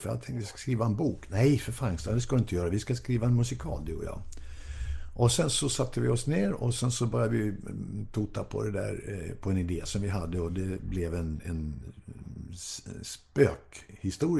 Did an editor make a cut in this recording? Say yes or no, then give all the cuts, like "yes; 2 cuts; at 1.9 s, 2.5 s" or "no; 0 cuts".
no; 0 cuts